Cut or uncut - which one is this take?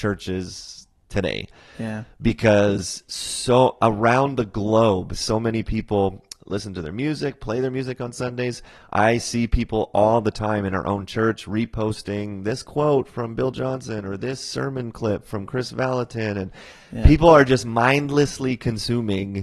uncut